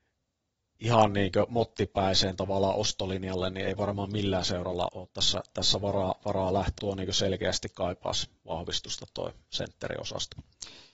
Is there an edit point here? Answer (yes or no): yes